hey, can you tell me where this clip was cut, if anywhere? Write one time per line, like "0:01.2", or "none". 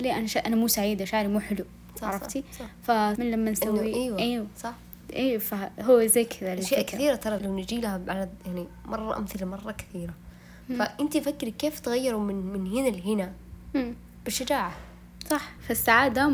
0:03.2
0:07.4